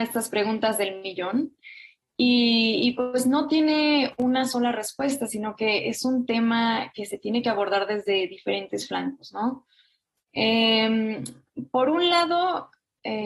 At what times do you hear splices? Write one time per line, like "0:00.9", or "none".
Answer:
none